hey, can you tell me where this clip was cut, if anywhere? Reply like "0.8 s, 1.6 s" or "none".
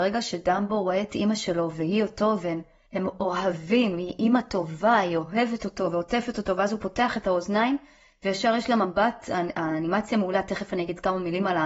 none